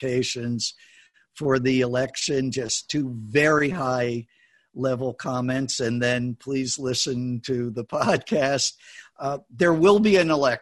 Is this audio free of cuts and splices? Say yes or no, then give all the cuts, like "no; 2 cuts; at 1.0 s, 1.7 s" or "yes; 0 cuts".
yes; 0 cuts